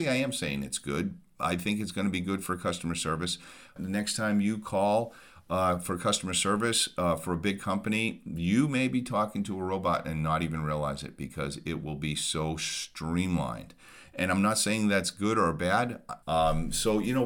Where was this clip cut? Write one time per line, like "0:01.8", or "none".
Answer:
0:03.8
0:16.2